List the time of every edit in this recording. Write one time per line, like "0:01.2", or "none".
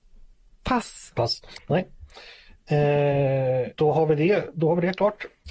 0:01.6
0:03.7